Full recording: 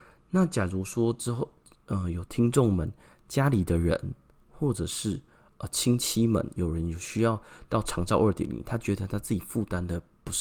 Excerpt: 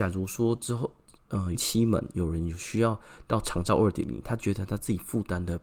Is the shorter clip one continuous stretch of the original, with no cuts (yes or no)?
no